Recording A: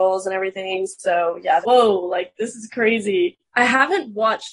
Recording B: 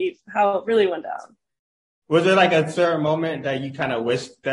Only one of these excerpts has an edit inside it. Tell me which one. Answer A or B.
A